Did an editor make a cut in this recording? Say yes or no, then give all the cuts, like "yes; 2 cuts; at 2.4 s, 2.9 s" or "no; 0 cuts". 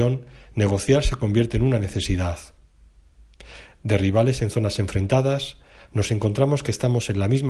no; 0 cuts